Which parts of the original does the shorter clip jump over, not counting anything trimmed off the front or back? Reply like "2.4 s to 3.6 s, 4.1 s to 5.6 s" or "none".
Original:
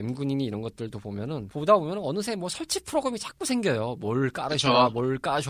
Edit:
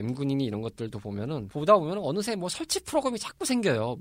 none